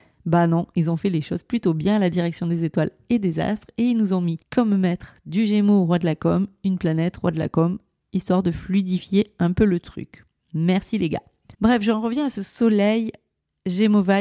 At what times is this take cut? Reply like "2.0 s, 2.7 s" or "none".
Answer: 4.4 s, 11.5 s